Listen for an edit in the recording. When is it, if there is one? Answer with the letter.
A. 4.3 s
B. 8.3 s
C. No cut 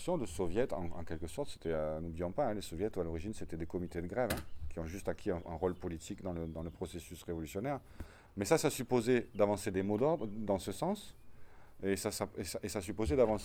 B